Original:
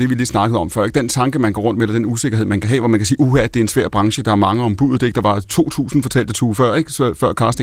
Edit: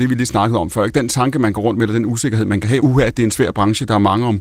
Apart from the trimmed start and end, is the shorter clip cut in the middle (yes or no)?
yes